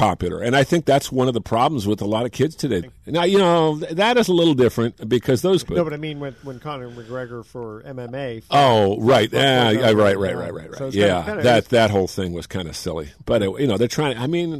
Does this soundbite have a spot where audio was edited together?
yes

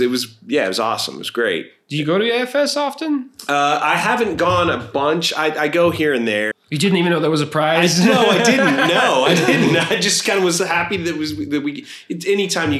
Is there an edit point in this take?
yes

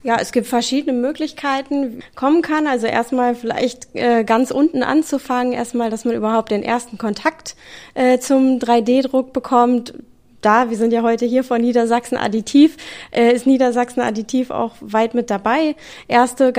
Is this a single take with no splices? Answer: no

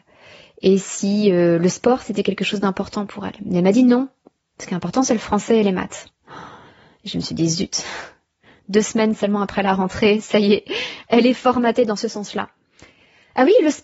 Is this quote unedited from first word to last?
yes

